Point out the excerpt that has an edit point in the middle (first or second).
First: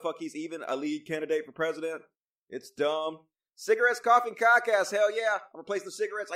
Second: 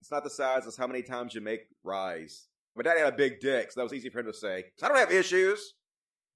second